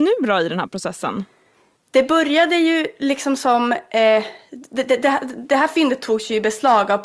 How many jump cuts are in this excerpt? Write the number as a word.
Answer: zero